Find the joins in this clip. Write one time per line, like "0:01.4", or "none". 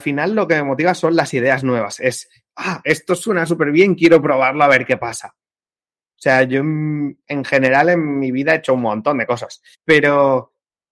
0:06.2
0:09.7